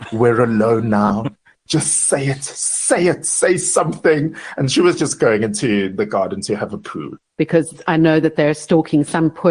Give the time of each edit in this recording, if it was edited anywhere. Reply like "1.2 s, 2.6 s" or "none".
7.3 s